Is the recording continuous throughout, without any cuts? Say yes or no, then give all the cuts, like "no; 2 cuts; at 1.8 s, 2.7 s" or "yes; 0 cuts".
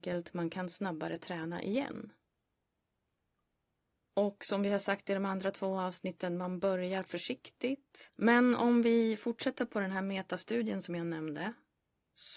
no; 1 cut; at 8.1 s